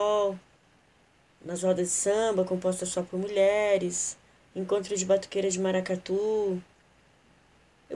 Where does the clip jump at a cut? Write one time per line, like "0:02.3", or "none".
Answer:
0:04.4